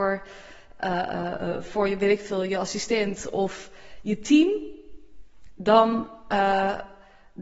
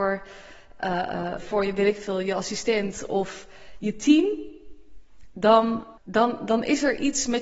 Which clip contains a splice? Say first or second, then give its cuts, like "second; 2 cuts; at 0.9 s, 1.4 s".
second; 2 cuts; at 1.4 s, 6.0 s